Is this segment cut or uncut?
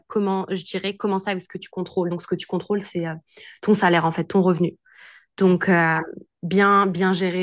uncut